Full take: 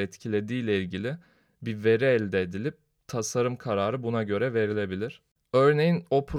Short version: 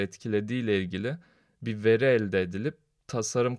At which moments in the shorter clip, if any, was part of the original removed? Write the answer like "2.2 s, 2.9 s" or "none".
none